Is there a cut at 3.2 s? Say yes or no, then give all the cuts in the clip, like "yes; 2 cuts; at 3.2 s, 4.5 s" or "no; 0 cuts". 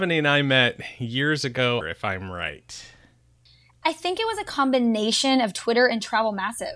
no; 1 cut; at 1.8 s